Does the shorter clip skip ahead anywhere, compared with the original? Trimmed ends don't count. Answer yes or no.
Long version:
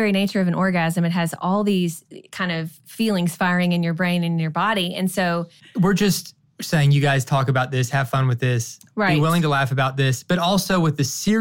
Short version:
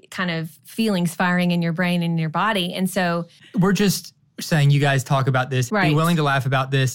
yes